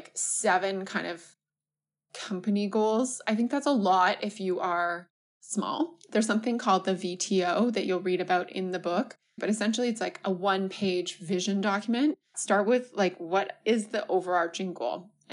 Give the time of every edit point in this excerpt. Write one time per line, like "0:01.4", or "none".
0:09.4
0:12.3

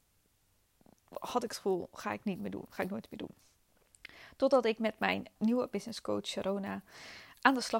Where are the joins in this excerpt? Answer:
0:05.4

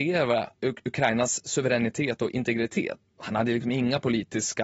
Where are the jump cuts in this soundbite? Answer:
0:03.0

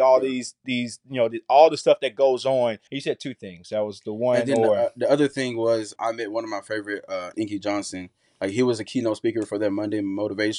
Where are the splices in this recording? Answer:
0:02.9
0:06.0
0:07.3

